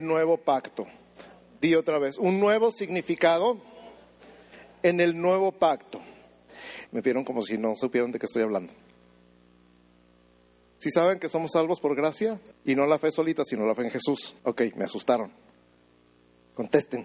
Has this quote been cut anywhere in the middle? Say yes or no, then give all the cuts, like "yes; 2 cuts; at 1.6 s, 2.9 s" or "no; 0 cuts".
yes; 3 cuts; at 6.9 s, 12.5 s, 14.4 s